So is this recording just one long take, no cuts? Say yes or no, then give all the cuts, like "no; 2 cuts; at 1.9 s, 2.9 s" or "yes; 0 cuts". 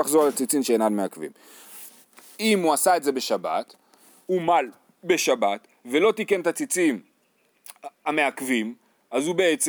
no; 1 cut; at 2.4 s